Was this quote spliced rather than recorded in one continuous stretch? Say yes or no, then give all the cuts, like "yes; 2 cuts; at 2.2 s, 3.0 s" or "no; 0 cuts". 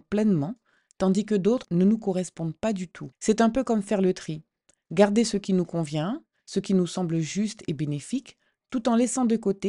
no; 0 cuts